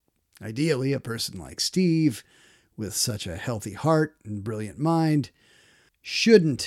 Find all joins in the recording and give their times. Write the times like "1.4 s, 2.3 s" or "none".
none